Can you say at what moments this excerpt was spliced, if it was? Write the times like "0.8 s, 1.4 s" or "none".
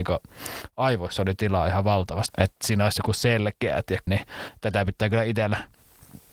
2.3 s, 4.1 s